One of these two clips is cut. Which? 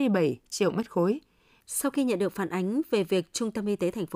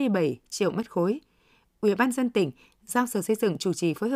first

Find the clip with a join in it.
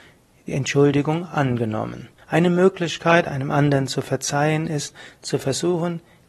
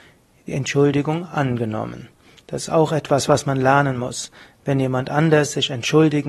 first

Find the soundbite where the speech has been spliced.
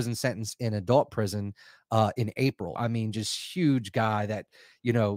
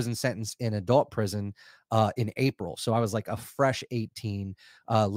first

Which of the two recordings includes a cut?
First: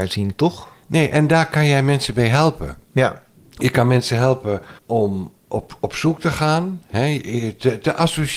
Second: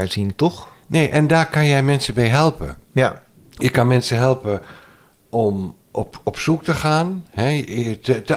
first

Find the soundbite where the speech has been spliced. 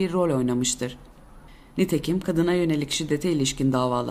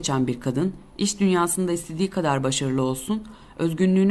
first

